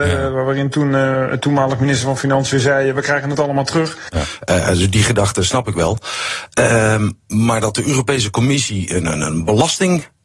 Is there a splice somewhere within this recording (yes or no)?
yes